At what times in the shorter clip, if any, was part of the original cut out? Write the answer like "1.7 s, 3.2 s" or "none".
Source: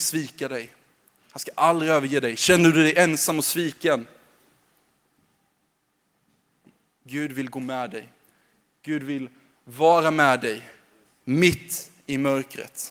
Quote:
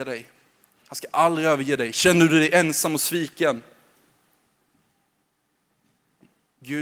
none